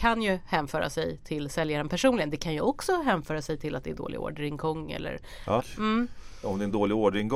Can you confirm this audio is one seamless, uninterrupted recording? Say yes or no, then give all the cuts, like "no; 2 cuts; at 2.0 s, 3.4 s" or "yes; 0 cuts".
no; 1 cut; at 5.6 s